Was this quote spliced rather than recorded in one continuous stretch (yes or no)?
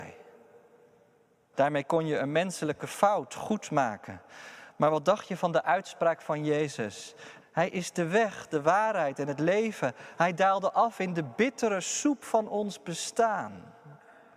yes